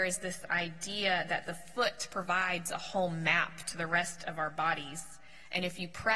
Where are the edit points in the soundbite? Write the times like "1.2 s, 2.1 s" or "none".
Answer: none